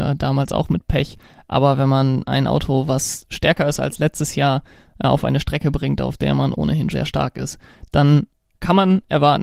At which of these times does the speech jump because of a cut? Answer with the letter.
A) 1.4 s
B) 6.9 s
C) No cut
B